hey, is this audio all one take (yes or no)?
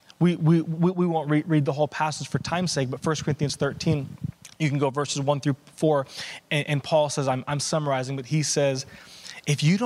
no